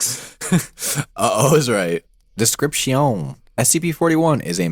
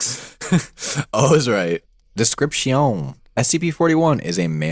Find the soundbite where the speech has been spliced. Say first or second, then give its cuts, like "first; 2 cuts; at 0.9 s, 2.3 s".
second; 1 cut; at 1.1 s